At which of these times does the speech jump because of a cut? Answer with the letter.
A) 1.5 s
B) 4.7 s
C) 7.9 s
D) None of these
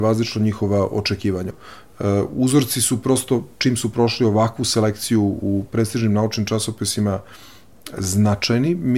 A